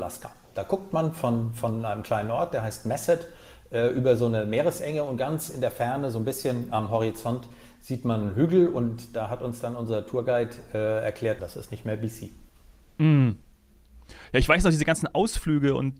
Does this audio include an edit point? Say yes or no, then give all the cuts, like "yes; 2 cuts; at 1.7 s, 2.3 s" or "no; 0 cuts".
yes; 1 cut; at 11.4 s